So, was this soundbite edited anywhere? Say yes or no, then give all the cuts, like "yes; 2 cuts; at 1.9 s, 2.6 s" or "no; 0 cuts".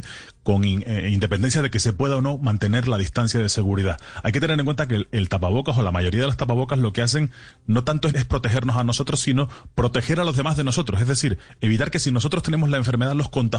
yes; 1 cut; at 8.1 s